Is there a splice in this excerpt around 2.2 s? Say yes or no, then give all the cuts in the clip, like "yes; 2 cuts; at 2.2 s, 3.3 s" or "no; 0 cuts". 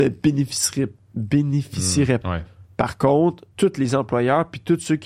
yes; 2 cuts; at 2.2 s, 3.5 s